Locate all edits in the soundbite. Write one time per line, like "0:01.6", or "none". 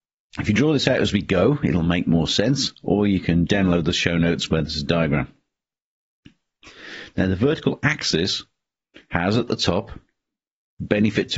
0:03.5